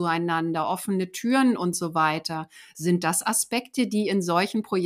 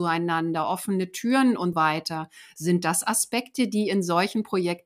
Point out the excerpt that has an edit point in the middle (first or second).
second